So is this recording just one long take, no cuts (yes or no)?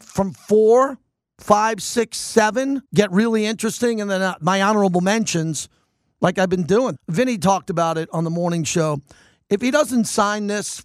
no